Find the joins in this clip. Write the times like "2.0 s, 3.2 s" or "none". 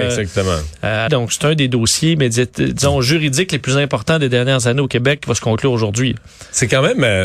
1.1 s